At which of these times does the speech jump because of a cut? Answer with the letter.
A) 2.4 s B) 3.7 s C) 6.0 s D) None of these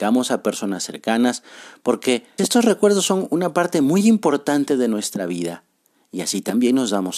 A